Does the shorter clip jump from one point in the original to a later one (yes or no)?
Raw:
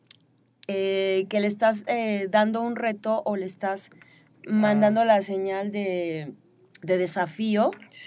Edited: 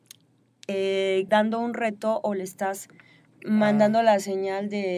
yes